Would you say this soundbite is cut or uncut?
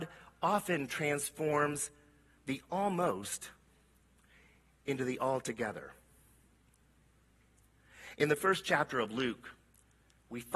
uncut